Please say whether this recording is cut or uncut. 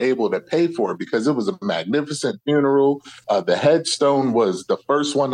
uncut